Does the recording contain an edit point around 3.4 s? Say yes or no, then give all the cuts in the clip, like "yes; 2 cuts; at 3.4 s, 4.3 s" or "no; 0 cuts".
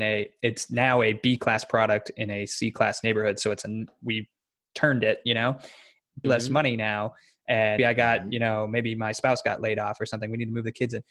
no; 2 cuts; at 6.2 s, 7.8 s